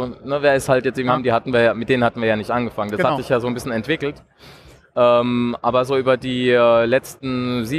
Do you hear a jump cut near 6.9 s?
no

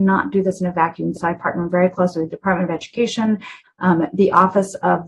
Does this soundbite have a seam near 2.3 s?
no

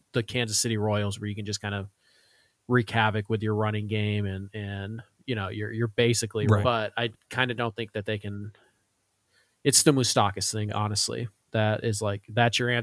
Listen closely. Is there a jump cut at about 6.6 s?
yes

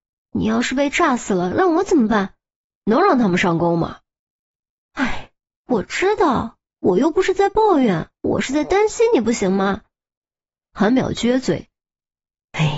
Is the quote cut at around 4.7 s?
no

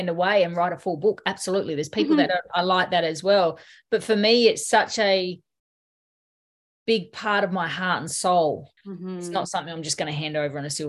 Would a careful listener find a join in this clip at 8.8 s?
yes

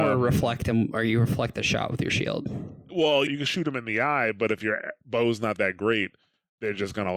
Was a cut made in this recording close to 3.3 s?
yes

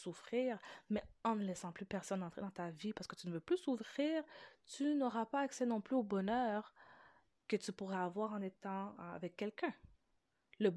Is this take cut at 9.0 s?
yes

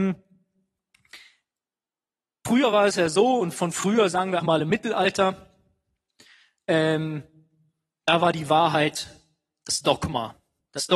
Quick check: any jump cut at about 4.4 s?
yes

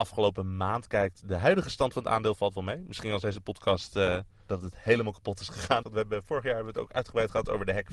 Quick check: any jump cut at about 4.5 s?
yes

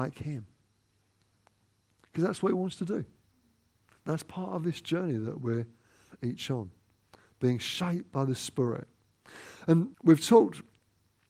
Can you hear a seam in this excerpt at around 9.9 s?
yes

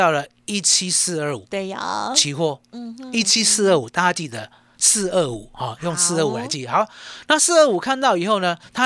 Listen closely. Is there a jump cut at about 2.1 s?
no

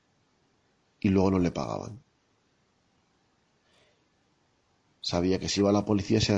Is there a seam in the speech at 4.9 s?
yes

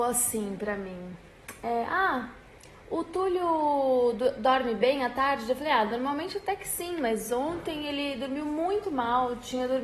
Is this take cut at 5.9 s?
no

